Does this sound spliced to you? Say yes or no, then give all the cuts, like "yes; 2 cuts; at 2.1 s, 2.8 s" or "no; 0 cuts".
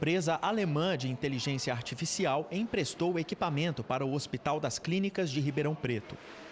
no; 0 cuts